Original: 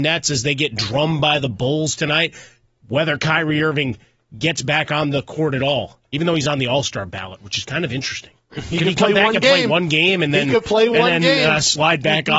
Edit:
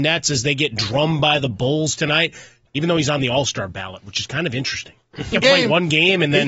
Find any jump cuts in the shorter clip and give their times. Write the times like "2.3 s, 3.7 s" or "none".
2.7 s, 5.3 s

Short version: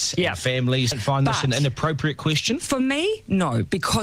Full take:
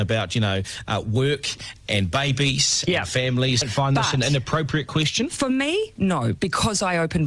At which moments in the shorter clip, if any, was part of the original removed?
none

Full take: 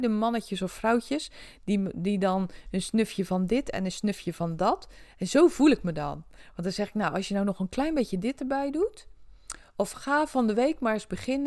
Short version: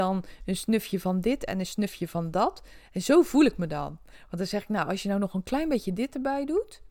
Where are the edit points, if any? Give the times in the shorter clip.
none

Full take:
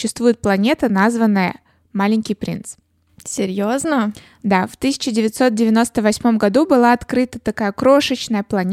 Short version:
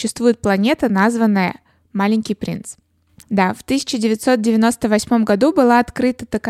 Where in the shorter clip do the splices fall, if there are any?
3.2 s

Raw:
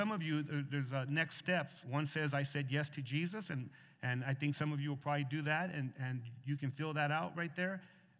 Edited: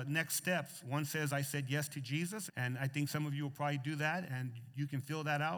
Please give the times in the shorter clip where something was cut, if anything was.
2.5 s, 4.3 s

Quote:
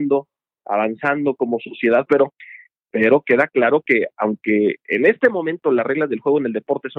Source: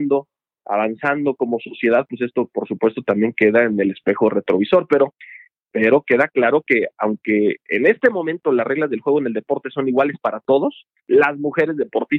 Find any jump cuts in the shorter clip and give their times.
2.1 s

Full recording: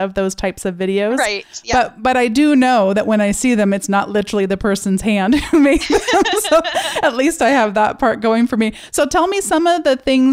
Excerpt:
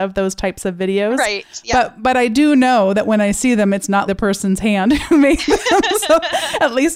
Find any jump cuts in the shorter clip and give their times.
4.1 s

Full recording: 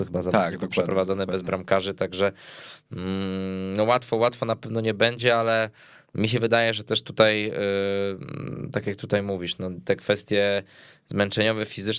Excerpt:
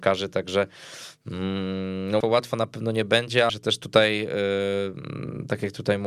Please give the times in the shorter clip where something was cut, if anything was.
2.2 s, 3.5 s

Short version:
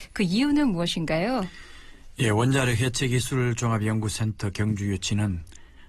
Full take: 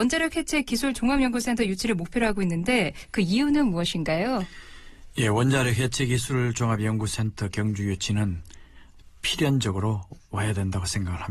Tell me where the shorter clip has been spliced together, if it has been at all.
none

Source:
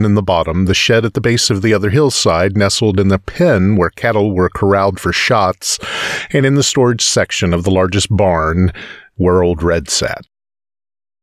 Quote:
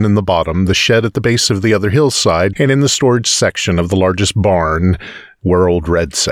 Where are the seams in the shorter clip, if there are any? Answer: 2.5 s

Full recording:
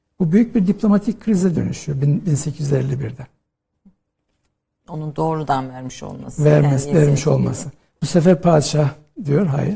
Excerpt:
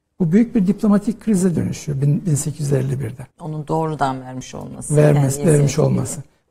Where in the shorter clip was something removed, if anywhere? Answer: 3.3 s

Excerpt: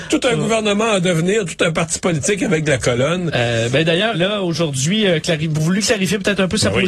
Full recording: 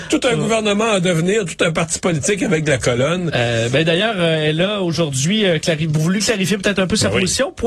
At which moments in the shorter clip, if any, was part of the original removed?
4.1 s

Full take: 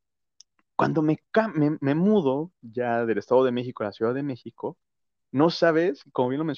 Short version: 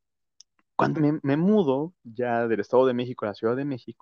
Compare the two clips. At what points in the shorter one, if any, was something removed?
0.9 s

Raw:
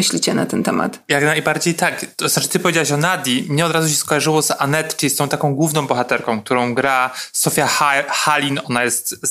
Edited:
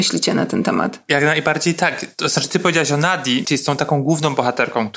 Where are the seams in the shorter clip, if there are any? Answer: 3.4 s

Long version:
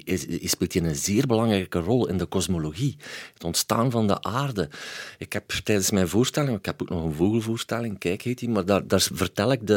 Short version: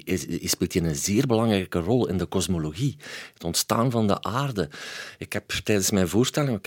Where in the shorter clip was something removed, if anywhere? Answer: none

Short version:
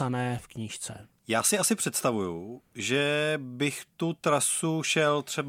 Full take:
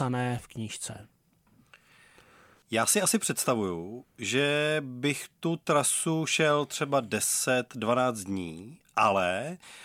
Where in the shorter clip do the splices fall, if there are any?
1.2 s

